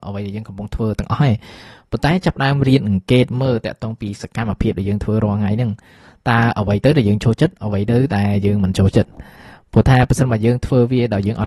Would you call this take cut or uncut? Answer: uncut